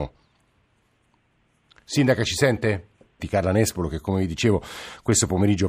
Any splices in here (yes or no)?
yes